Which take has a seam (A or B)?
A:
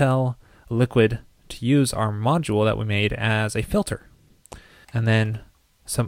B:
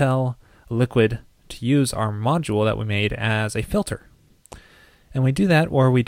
A